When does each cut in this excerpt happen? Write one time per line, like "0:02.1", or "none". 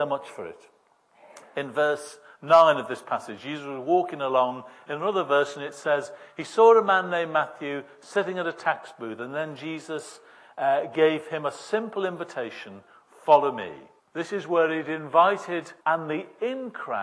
0:14.0
0:15.8